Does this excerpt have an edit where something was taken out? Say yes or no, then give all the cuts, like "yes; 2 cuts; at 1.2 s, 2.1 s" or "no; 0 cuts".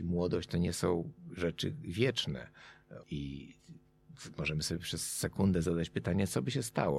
yes; 1 cut; at 3.0 s